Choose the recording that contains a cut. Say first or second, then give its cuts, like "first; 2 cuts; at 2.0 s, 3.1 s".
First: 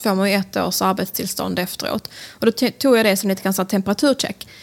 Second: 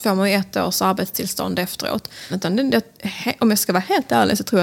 second; 1 cut; at 2.3 s